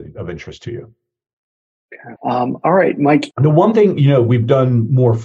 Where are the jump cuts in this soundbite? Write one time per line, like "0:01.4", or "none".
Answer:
0:02.2
0:03.3